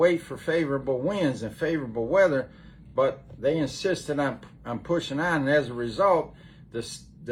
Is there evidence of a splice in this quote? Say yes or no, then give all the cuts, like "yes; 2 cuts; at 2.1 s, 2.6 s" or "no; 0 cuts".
no; 0 cuts